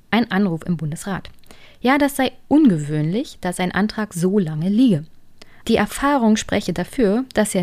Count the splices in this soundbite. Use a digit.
1